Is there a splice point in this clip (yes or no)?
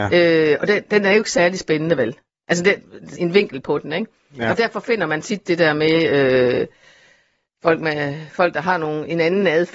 yes